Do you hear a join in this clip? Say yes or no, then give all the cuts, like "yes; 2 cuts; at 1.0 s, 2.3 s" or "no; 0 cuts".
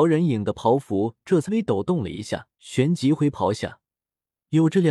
yes; 2 cuts; at 1.5 s, 2.5 s